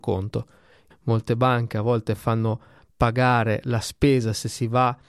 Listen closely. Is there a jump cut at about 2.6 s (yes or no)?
no